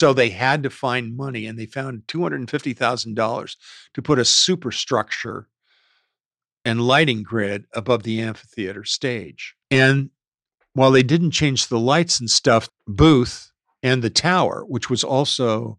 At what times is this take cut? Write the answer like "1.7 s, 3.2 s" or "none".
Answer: 9.6 s, 12.7 s